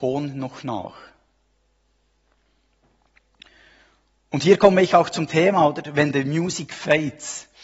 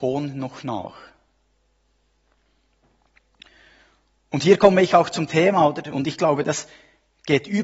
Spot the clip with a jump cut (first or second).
second